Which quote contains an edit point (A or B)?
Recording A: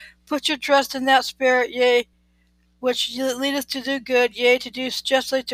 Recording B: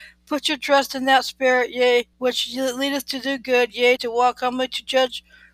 B